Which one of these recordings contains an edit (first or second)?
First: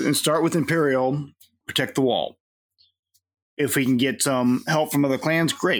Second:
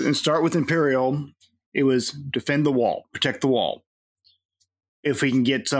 first